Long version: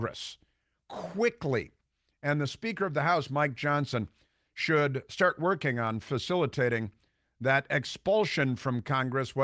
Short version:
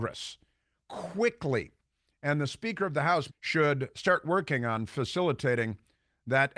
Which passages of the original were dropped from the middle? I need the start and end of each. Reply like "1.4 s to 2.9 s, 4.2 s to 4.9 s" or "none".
3.3 s to 4.4 s